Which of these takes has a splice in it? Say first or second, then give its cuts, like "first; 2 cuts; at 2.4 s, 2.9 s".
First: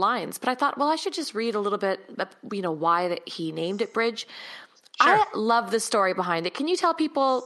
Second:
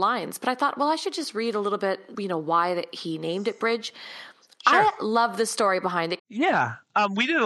second; 2 cuts; at 2.1 s, 6.2 s